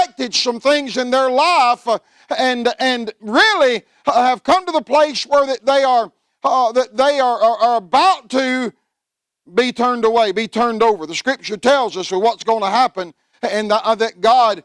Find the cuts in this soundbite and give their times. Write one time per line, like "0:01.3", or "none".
none